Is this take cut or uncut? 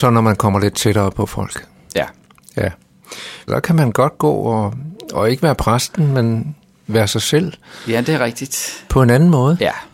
cut